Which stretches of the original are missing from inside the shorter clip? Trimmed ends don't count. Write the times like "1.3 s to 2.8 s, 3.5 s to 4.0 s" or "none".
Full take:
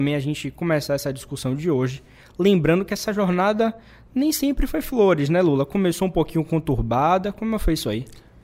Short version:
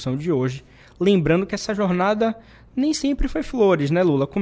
none